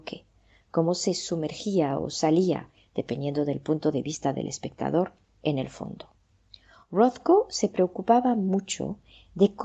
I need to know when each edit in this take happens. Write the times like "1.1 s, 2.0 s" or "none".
none